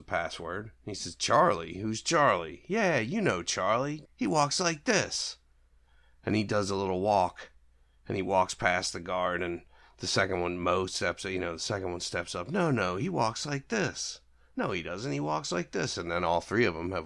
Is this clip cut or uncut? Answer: cut